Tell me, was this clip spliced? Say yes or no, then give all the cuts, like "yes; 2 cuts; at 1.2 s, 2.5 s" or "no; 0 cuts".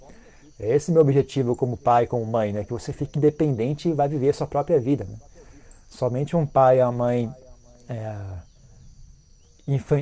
no; 0 cuts